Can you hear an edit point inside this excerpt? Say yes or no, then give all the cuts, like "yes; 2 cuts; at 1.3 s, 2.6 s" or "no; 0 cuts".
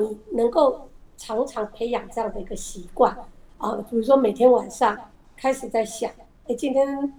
no; 0 cuts